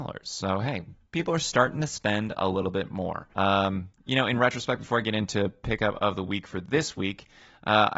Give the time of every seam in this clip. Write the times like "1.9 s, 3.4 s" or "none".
3.3 s